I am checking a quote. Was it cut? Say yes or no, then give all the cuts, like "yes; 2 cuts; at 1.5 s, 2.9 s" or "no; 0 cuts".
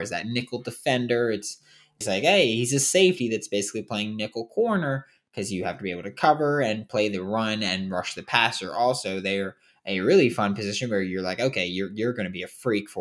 yes; 1 cut; at 2.0 s